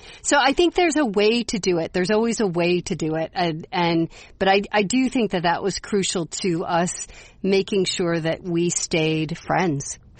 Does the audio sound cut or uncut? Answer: uncut